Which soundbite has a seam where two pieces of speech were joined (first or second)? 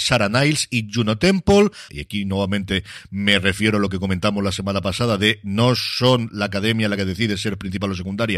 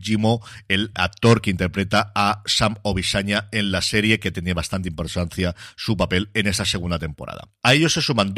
first